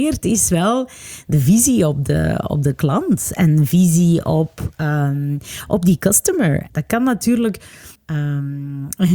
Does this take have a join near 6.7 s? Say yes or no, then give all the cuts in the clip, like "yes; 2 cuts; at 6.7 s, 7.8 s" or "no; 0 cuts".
yes; 2 cuts; at 6.7 s, 8.0 s